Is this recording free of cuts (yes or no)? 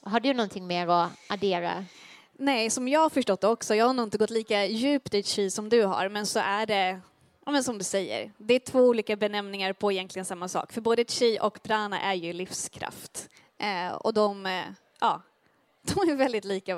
yes